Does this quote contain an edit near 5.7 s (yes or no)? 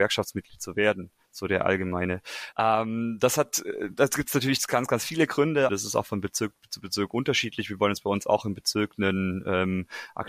yes